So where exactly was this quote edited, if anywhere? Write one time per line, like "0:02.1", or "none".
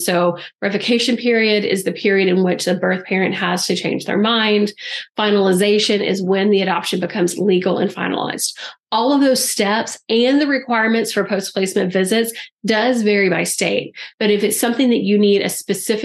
0:14.1